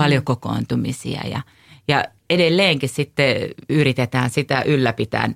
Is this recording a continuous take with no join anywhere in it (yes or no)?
yes